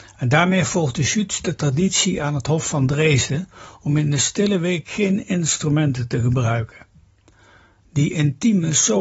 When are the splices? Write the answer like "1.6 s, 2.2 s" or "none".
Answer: none